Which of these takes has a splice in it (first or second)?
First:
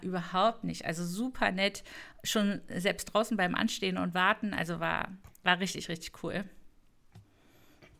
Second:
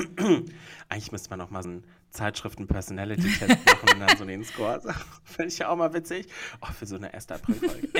second